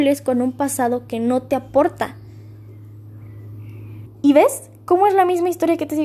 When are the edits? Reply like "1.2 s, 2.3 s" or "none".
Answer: 4.1 s

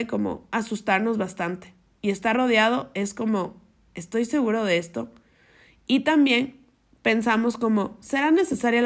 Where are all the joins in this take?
none

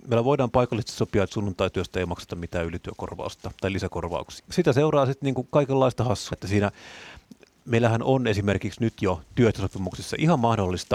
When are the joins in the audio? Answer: 4.4 s, 6.3 s

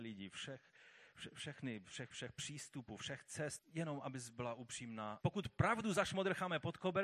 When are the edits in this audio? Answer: 2.1 s, 3.6 s, 5.2 s

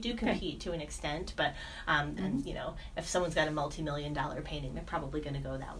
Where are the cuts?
2.2 s

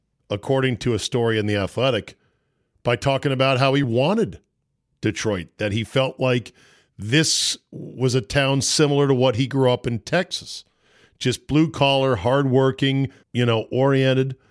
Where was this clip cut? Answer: 3.8 s, 13.2 s

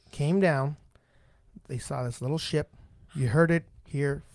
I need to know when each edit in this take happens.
3.1 s

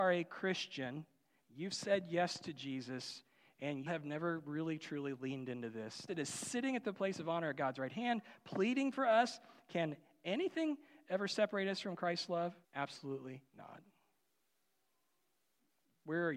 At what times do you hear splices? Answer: 3.9 s, 6.1 s, 12.6 s

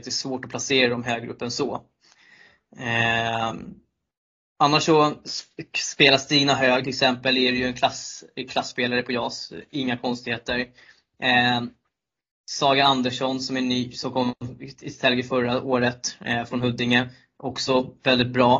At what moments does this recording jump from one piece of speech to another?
none

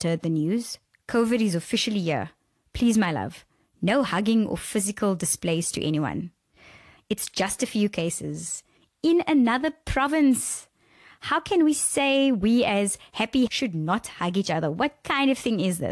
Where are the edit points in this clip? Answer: 7.0 s, 13.5 s

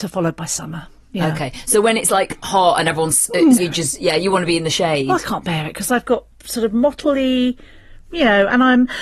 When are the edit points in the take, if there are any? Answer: 3.6 s

